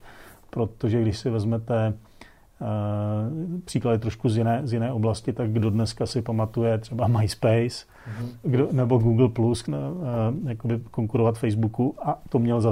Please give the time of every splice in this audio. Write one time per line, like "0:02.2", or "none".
0:08.4
0:09.6